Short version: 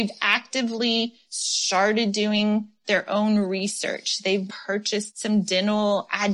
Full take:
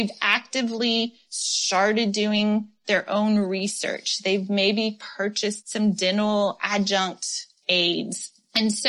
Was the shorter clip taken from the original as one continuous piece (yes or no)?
no